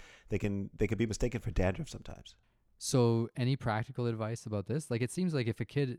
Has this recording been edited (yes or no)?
no